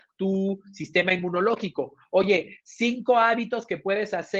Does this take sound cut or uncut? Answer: uncut